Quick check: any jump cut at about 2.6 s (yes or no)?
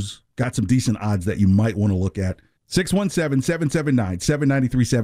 yes